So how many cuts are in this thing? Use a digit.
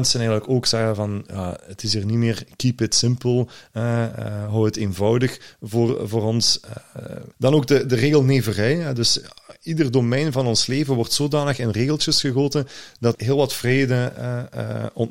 2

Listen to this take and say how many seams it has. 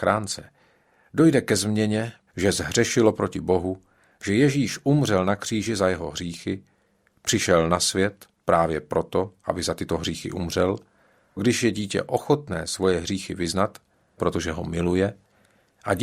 3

